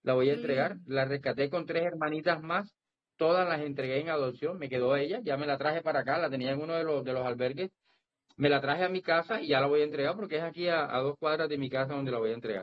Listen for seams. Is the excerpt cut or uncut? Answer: uncut